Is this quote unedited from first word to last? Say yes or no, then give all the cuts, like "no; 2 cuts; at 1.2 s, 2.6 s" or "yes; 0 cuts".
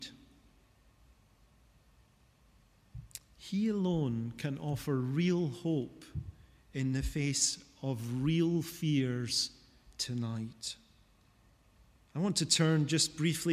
yes; 0 cuts